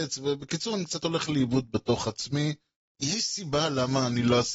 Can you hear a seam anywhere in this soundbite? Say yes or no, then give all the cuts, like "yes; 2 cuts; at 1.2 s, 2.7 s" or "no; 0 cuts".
yes; 1 cut; at 2.9 s